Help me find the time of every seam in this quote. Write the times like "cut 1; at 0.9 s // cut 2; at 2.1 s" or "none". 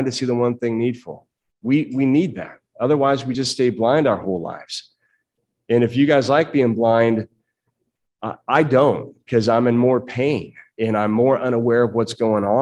none